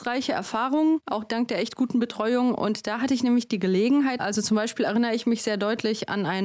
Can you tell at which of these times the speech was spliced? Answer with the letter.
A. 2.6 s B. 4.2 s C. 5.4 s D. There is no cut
B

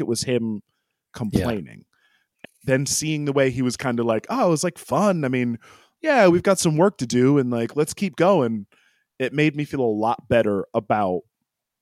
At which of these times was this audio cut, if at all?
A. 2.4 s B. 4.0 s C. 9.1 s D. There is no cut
A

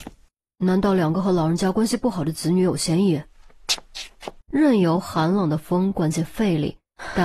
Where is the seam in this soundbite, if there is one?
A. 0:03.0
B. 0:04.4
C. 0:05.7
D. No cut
B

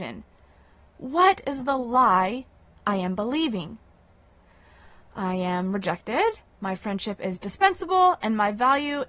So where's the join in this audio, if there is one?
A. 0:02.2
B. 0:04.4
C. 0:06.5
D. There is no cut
D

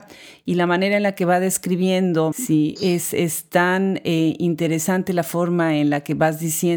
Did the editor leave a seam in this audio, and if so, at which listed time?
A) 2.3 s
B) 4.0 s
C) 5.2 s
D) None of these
A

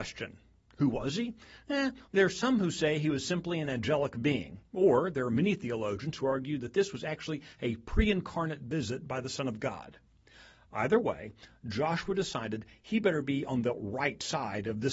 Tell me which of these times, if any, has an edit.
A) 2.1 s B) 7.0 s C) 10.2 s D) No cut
A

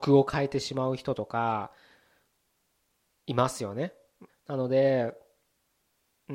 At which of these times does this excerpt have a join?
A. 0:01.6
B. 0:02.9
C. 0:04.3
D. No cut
C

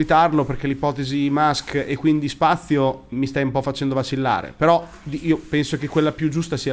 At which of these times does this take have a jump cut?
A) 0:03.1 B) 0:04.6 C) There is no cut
A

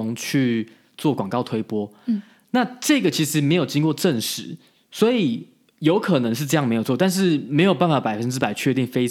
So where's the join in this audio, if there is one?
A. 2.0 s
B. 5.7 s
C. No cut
C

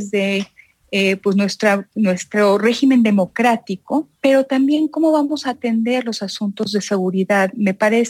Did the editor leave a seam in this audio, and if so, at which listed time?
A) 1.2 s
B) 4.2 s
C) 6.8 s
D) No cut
B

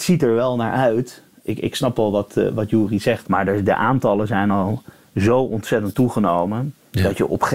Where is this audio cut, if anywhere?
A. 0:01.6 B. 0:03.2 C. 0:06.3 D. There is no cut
B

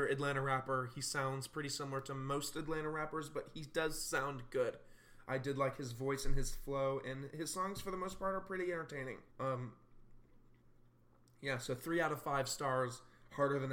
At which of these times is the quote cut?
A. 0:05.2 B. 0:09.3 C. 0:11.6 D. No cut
B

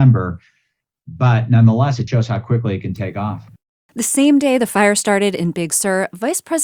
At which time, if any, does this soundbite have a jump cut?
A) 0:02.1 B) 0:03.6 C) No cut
A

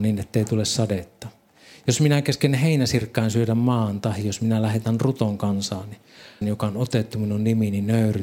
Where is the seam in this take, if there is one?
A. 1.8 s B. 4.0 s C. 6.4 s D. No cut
C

